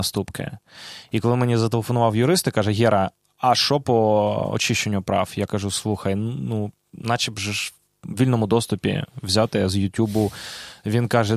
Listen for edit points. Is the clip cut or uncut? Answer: uncut